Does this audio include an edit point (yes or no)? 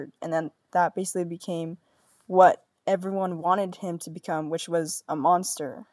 no